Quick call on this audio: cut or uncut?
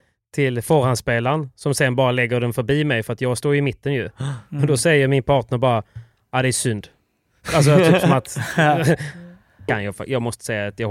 cut